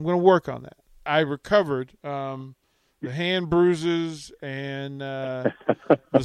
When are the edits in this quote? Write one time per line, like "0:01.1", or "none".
0:01.1

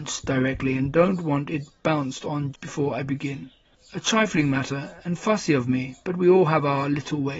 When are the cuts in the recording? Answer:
0:02.5

